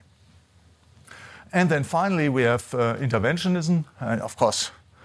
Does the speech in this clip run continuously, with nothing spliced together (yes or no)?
yes